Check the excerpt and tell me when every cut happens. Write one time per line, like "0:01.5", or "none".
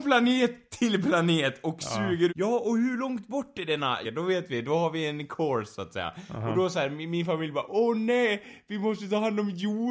0:02.3
0:04.0